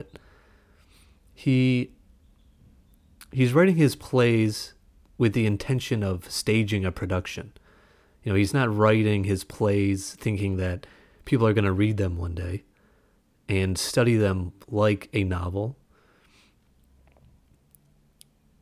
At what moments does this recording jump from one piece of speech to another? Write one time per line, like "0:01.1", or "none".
none

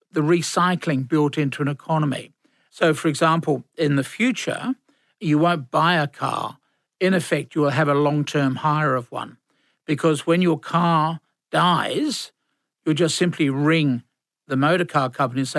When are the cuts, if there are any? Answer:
none

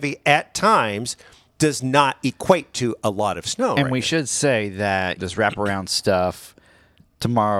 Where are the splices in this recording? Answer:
0:05.2

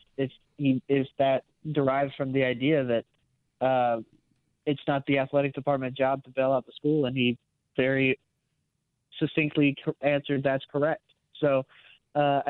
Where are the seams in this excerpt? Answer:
none

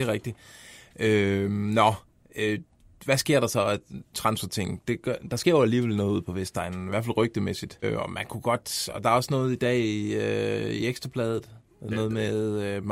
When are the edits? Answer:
0:07.8

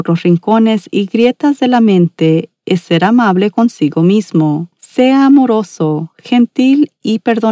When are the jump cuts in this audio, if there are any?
0:04.7

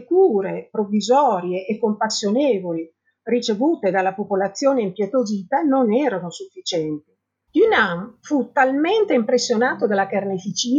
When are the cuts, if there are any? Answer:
0:07.5

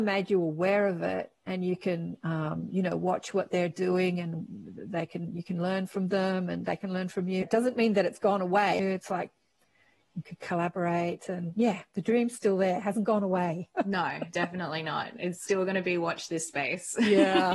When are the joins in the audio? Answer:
0:07.4
0:08.8

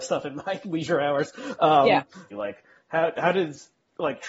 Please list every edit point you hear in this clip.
0:02.3

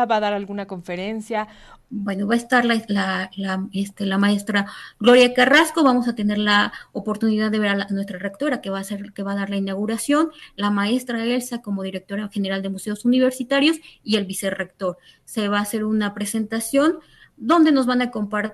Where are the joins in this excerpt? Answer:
0:01.8

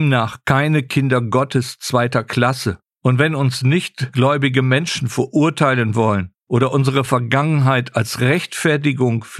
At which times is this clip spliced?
0:02.9

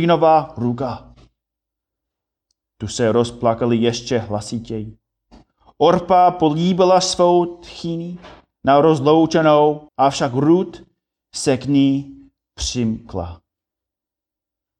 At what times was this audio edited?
0:09.9

